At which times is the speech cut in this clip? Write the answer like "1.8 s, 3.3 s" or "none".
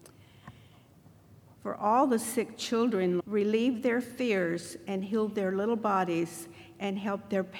1.5 s, 3.2 s